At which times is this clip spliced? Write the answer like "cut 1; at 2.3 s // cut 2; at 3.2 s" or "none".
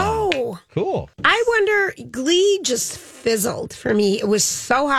cut 1; at 1.1 s